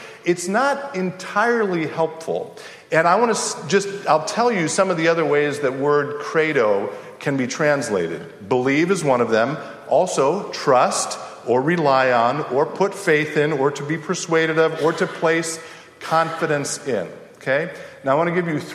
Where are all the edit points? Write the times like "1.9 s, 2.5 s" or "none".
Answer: none